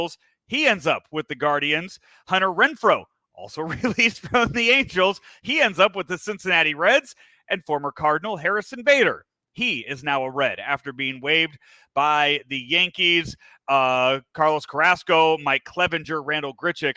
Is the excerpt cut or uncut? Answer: uncut